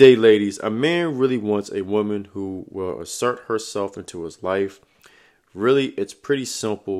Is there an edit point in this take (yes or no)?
no